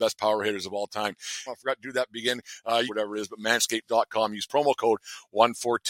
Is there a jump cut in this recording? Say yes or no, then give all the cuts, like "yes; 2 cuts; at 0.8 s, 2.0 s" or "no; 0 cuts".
yes; 2 cuts; at 1.5 s, 2.9 s